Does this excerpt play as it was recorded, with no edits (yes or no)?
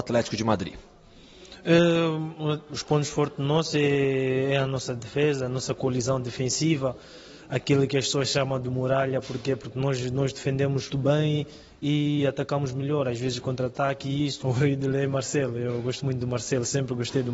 no